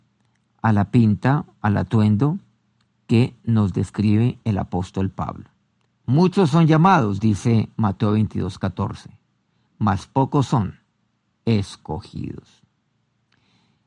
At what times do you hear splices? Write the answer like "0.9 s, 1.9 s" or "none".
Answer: 5.8 s